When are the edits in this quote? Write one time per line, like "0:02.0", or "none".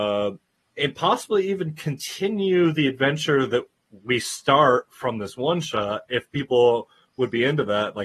none